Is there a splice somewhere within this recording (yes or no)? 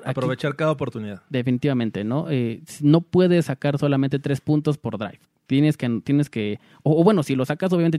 no